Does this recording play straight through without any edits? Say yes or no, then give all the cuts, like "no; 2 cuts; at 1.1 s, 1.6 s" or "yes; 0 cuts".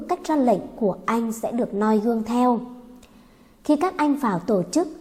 yes; 0 cuts